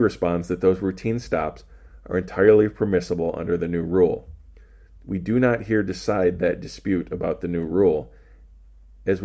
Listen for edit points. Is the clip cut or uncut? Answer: uncut